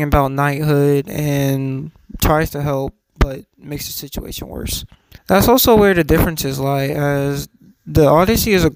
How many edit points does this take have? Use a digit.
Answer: 1